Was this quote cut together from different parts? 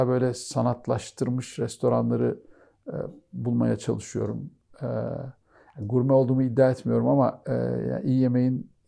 no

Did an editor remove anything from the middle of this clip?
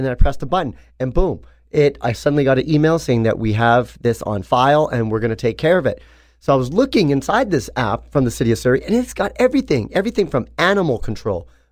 no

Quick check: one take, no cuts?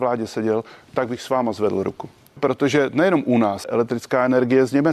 no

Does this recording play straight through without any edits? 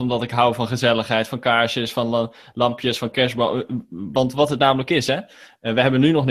yes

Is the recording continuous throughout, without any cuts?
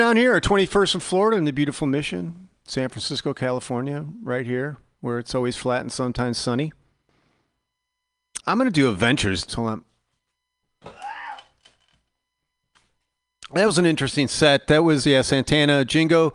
no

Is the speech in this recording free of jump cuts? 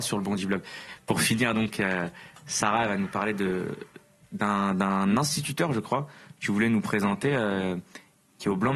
yes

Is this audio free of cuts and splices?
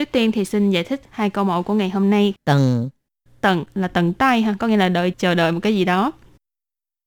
no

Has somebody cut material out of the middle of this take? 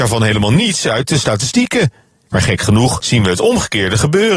yes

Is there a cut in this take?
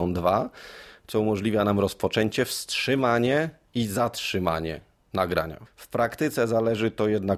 yes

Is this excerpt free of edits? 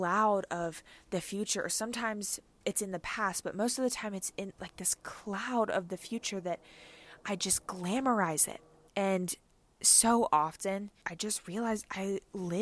no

